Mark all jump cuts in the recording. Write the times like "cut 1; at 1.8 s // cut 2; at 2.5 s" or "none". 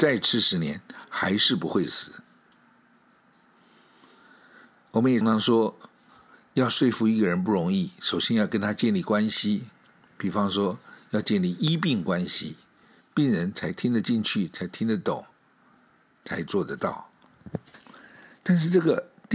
cut 1; at 5.2 s // cut 2; at 13.0 s